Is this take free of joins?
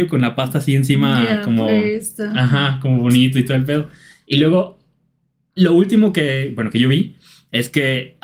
yes; 0 cuts

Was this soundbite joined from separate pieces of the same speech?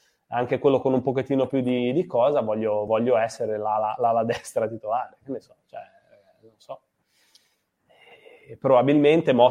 no; 0 cuts

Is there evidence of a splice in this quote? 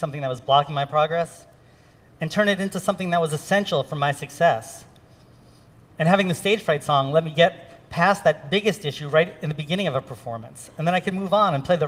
no; 0 cuts

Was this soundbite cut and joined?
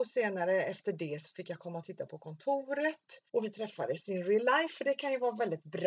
yes; 1 cut; at 3.3 s

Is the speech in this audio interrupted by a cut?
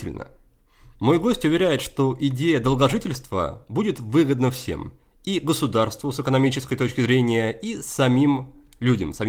no; 0 cuts

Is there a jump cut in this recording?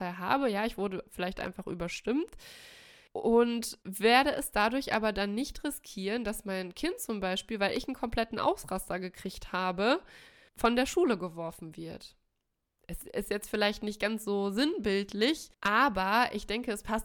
yes; 1 cut; at 15.5 s

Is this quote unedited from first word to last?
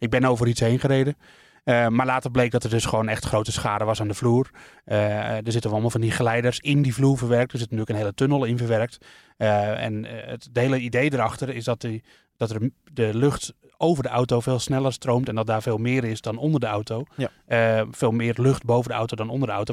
yes; 0 cuts

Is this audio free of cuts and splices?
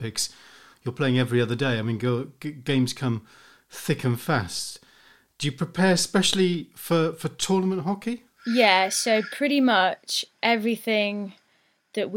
yes; 0 cuts

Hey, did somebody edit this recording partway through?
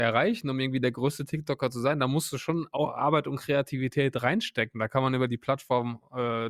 no; 0 cuts

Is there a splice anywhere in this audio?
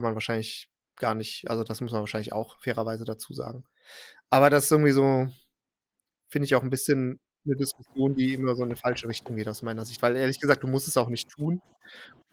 no; 0 cuts

